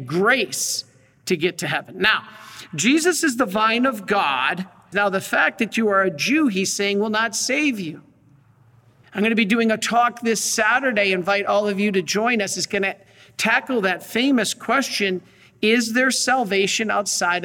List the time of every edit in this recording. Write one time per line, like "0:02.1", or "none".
0:04.9
0:09.0